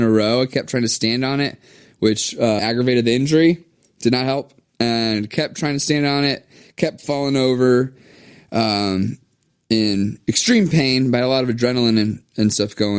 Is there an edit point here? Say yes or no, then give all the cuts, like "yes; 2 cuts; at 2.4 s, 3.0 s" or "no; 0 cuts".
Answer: yes; 1 cut; at 2.6 s